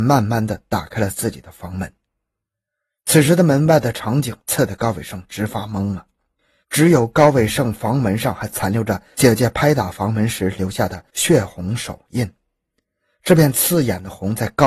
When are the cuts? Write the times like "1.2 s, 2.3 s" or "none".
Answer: 6.6 s